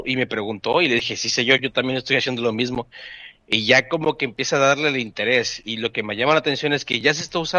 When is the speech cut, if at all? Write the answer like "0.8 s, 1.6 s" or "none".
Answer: none